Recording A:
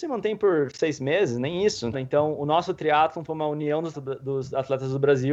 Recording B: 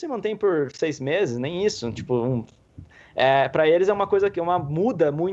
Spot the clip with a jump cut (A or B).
A